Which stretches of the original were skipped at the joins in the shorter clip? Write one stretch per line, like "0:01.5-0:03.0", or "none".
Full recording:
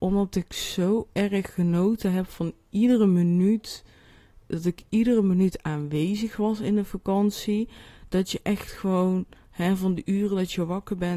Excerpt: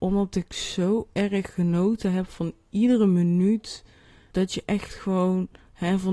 0:04.3-0:08.1